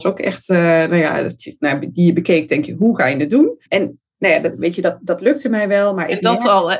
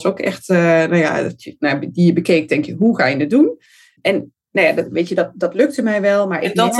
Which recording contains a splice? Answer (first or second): first